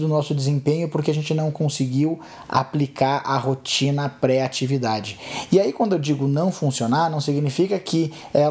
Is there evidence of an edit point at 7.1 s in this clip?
no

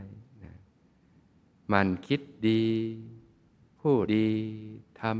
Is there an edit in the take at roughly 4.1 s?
yes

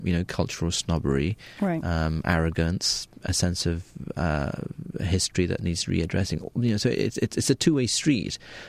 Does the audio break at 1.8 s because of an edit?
no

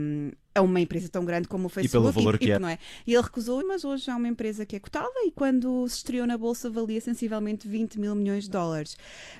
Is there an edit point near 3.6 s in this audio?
yes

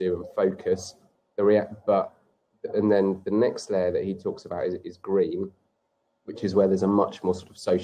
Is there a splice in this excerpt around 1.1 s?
no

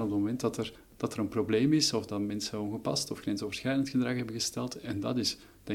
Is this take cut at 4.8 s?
no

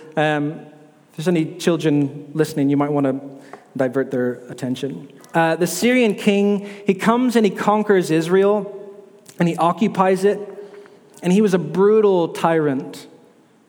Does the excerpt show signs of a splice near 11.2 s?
no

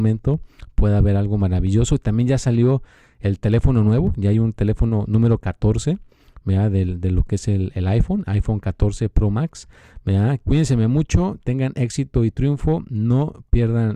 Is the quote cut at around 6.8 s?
no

